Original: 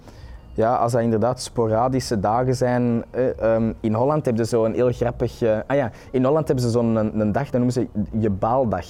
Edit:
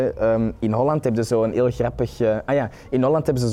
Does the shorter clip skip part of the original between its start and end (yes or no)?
no